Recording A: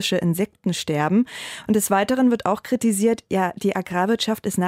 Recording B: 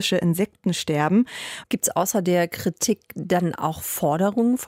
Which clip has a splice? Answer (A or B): B